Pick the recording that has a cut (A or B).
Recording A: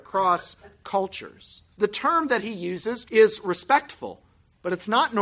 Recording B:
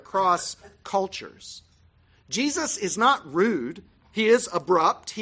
A